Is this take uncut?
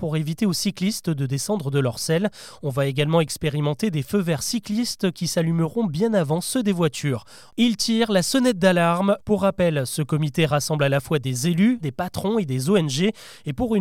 no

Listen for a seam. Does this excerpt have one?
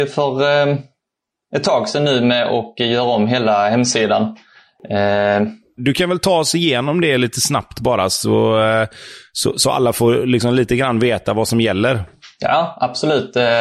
yes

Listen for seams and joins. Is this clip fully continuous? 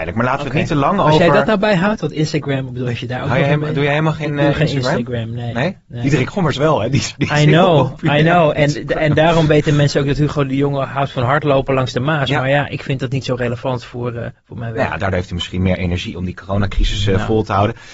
yes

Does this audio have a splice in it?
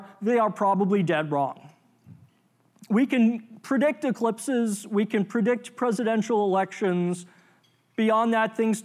no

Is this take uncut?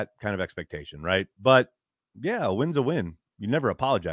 yes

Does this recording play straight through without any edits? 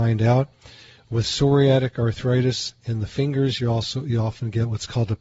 yes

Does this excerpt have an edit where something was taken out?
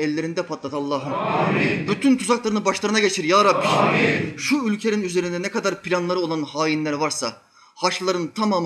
yes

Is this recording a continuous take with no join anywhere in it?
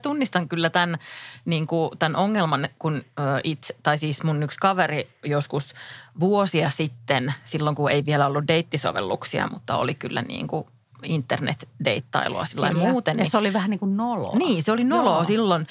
yes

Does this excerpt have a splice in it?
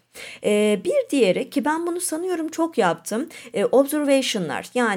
no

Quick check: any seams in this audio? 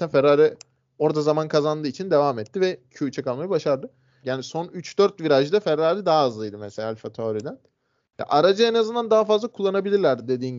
yes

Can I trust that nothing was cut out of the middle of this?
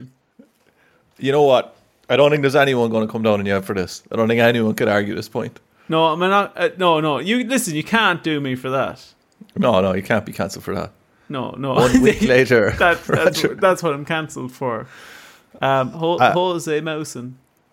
yes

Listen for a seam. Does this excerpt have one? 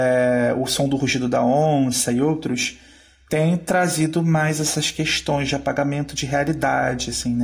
no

